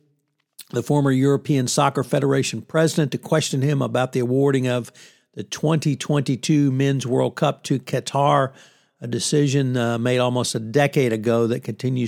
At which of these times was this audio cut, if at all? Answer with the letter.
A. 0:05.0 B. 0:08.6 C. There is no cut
C